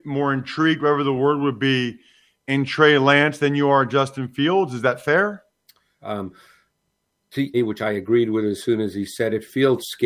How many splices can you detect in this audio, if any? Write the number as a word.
two